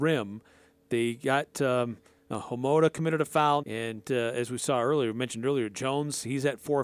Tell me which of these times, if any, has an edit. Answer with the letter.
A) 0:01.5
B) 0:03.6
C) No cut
B